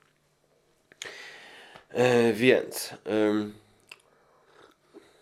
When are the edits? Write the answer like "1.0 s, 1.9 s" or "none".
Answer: none